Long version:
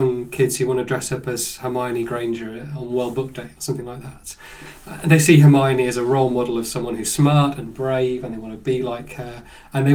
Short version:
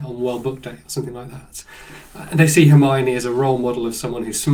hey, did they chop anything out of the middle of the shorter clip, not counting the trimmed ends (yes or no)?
no